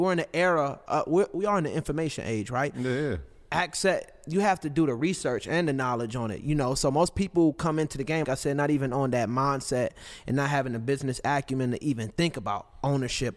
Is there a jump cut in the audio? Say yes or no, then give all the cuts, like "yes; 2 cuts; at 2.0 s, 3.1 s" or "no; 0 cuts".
yes; 1 cut; at 8.2 s